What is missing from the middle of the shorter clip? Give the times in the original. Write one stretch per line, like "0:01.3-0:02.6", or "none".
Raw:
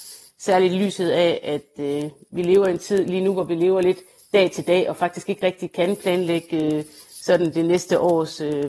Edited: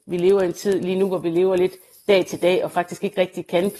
none

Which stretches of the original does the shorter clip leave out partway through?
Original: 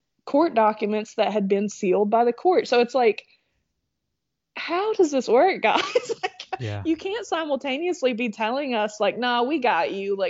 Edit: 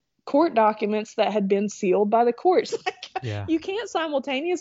0:02.7-0:06.1

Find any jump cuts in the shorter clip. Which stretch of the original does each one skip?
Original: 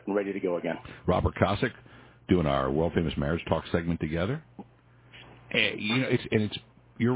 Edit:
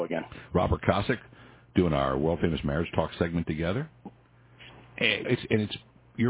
0:05.8-0:06.1

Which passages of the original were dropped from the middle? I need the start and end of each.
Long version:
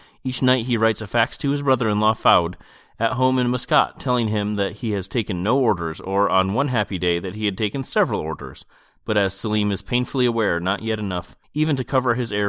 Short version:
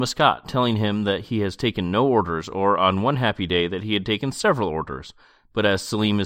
none

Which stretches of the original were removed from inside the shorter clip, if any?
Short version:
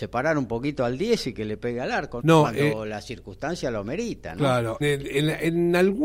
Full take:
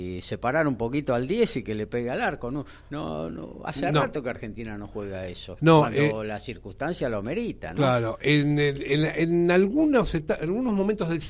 0:02.5-0:05.6
0:08.2-0:08.6

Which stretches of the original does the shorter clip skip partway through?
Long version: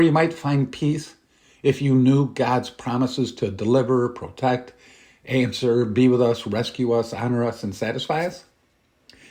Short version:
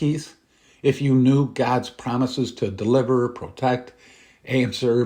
none

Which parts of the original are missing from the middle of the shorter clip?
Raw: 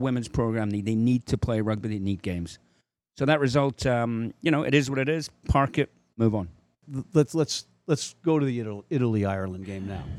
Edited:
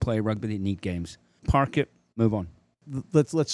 0:02.8-0:05.4

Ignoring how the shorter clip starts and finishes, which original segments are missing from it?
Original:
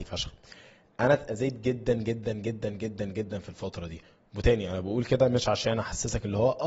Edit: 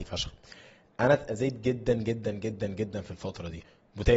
0:02.2-0:02.6

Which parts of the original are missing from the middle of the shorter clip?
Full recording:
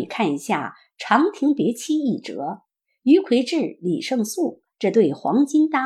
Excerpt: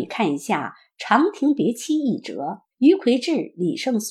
0:02.7-0:03.0

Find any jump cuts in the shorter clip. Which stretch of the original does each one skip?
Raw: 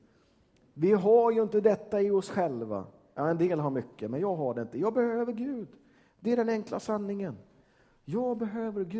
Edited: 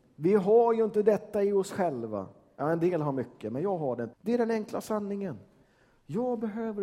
0:04.7-0:06.1

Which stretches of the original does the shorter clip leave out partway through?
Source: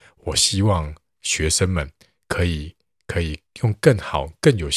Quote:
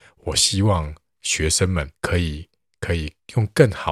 0:02.0-0:02.2

